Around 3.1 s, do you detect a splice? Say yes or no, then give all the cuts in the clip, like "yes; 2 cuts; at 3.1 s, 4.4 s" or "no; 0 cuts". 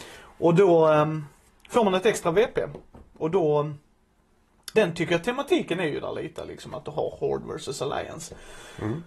no; 1 cut; at 4.7 s